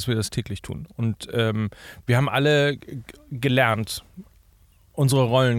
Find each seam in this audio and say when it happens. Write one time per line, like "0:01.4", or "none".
none